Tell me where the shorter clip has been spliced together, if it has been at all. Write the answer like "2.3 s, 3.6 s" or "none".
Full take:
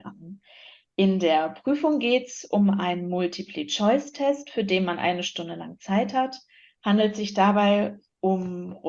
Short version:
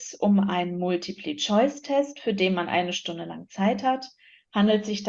none